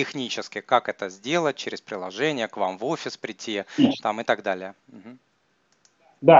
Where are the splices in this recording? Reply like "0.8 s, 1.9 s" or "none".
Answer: 4.8 s